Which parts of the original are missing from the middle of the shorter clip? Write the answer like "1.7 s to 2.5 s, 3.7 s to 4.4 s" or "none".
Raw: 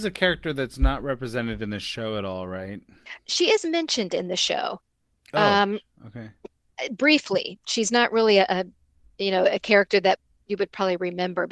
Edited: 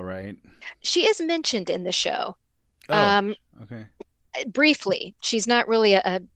none